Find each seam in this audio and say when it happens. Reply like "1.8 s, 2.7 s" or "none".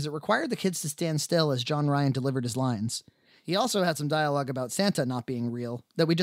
none